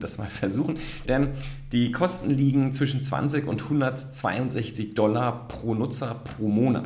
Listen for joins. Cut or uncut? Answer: cut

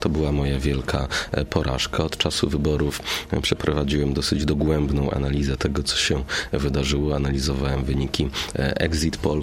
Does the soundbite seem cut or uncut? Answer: uncut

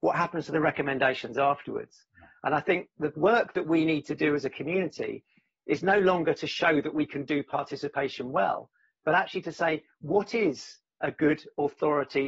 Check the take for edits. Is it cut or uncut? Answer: uncut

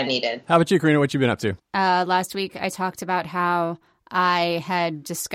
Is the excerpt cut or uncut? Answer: cut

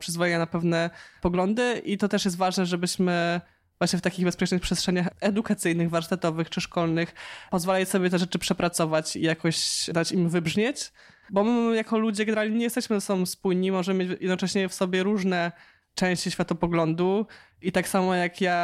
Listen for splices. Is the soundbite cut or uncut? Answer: uncut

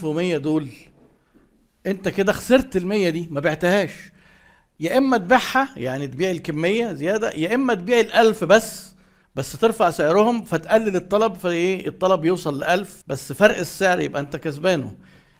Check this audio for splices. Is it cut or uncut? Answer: cut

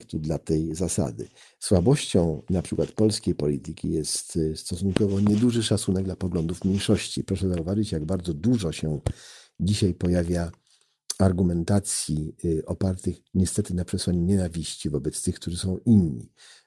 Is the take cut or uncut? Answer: uncut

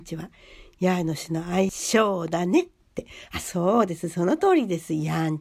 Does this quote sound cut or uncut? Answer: uncut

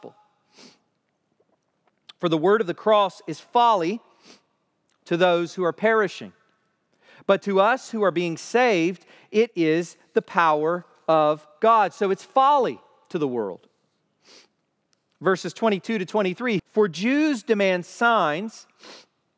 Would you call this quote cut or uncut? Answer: cut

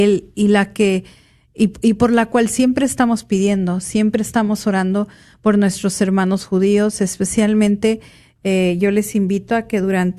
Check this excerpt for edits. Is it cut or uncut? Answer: uncut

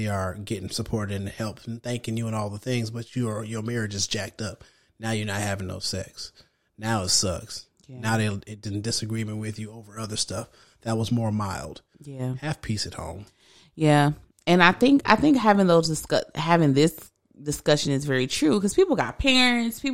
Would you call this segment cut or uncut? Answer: uncut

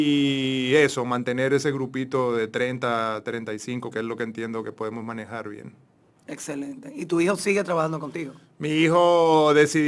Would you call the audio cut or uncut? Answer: cut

